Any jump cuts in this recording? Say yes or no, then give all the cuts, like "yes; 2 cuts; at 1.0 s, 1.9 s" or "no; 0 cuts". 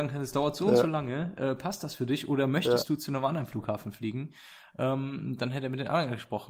no; 0 cuts